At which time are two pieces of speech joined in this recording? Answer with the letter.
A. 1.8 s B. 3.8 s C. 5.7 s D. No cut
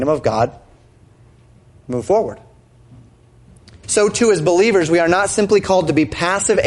B